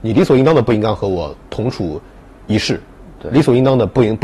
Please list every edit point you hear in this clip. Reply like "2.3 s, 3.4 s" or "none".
none